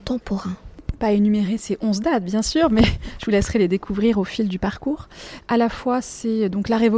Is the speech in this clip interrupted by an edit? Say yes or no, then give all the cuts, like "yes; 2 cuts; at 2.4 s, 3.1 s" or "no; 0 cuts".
yes; 1 cut; at 5.4 s